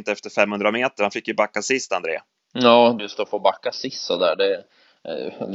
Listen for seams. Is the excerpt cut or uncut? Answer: cut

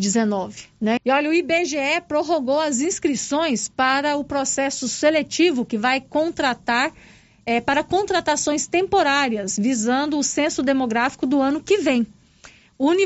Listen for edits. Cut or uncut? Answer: cut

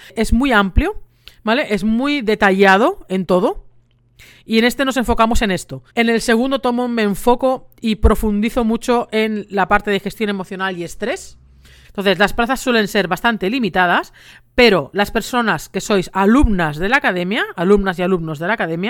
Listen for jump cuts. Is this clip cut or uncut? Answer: cut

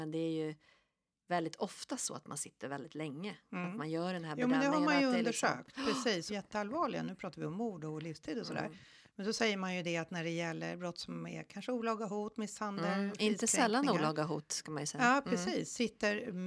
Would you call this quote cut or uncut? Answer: cut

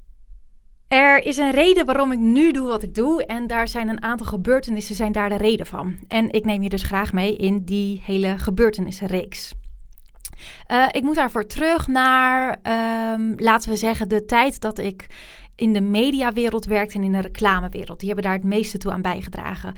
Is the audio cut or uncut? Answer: uncut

